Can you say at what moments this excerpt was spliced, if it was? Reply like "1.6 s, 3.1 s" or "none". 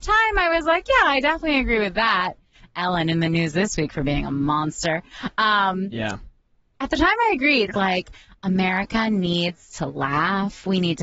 7.7 s